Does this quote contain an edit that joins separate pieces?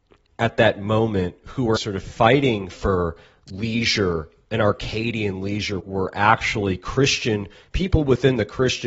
yes; 2 cuts; at 1.8 s, 5.8 s

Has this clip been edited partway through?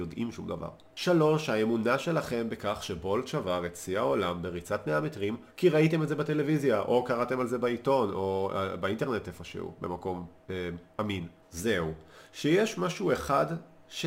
yes; 2 cuts; at 5.5 s, 11.4 s

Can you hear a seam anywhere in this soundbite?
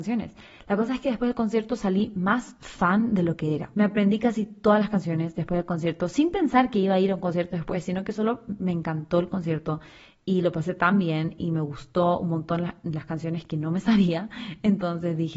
yes; 1 cut; at 3.7 s

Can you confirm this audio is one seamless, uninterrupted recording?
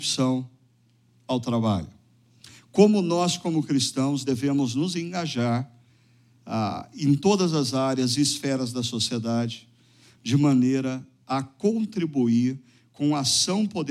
yes; 0 cuts

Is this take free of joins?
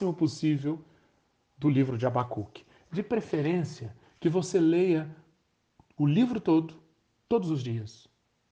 yes; 0 cuts

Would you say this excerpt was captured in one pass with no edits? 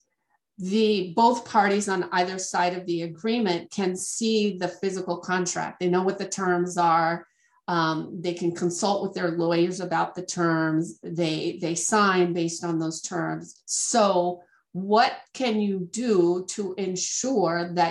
no; 1 cut; at 13.5 s

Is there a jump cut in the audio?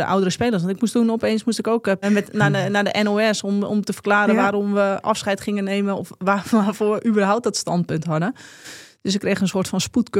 yes; 1 cut; at 2.0 s

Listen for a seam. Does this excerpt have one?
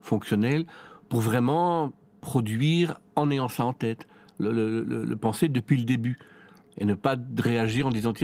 no; 0 cuts

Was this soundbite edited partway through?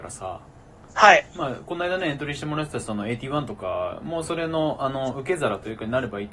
no; 0 cuts

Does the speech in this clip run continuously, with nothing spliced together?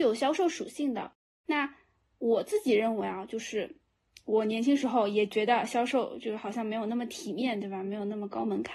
yes; 0 cuts

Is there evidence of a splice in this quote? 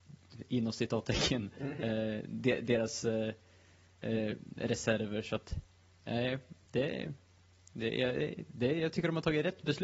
no; 0 cuts

